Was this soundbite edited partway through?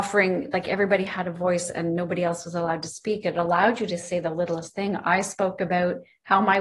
no; 0 cuts

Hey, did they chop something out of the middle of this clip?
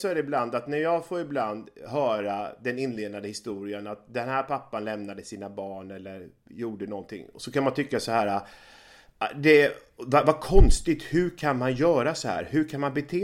no; 0 cuts

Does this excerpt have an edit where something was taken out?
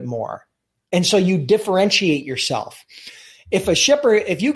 no; 0 cuts

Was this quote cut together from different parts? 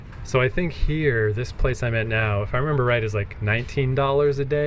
no; 0 cuts

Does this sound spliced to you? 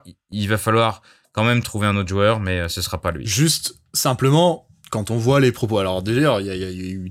no; 0 cuts

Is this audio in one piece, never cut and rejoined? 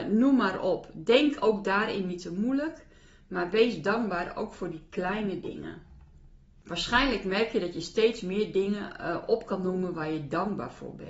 yes; 0 cuts

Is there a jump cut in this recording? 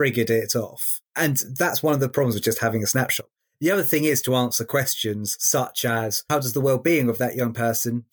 no; 0 cuts

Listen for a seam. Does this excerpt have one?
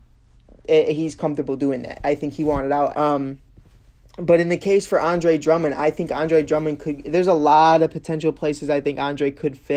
yes; 1 cut; at 2.9 s

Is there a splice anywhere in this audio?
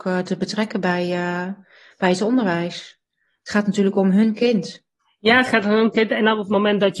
no; 0 cuts

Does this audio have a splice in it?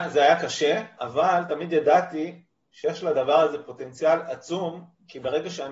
yes; 1 cut; at 1.0 s

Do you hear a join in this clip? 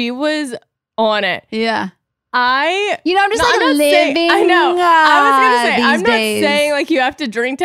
no; 0 cuts

